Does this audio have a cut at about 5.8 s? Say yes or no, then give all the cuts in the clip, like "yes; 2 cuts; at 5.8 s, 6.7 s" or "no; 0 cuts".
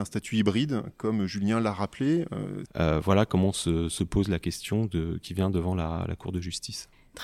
no; 1 cut; at 2.7 s